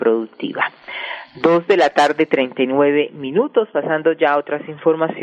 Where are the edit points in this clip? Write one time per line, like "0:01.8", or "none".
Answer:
none